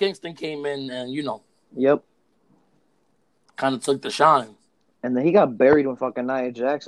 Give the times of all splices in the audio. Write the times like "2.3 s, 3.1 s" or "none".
none